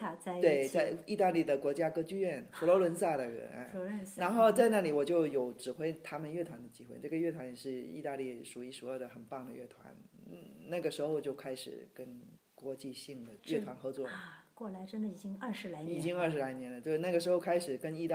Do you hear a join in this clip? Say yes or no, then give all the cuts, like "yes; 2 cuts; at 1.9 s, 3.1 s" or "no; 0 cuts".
no; 0 cuts